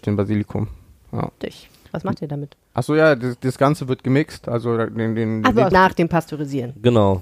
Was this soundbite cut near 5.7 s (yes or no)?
yes